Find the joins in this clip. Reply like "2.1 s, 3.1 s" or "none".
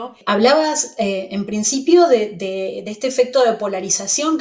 none